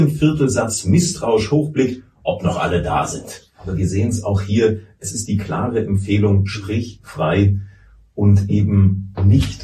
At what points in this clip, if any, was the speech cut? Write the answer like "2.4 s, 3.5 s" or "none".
none